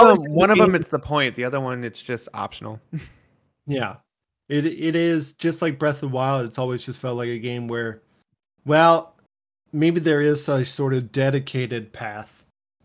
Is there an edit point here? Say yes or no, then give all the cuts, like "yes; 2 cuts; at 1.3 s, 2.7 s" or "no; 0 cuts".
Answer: no; 0 cuts